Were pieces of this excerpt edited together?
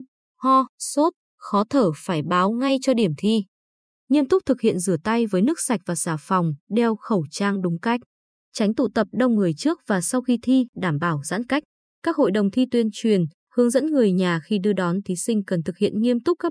no; 0 cuts

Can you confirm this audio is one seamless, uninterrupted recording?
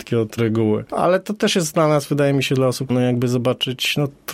no; 1 cut; at 2.9 s

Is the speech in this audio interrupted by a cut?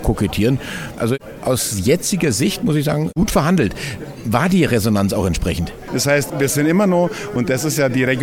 yes; 2 cuts; at 1.0 s, 5.9 s

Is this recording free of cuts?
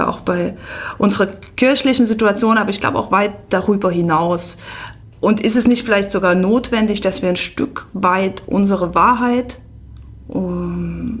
no; 1 cut; at 5.1 s

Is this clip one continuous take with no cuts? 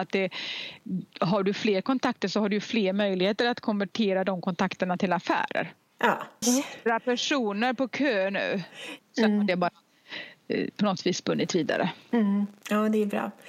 no; 3 cuts; at 1.1 s, 6.4 s, 9.0 s

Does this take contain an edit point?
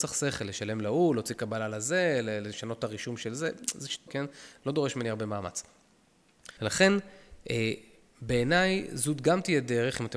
yes; 2 cuts; at 4.1 s, 6.6 s

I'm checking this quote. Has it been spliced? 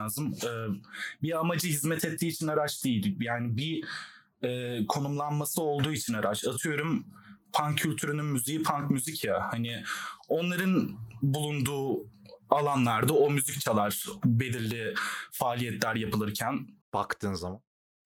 yes; 1 cut; at 16.8 s

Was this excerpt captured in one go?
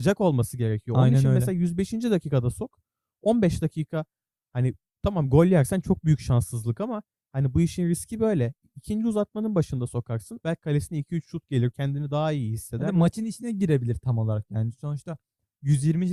no; 2 cuts; at 10.4 s, 11.7 s

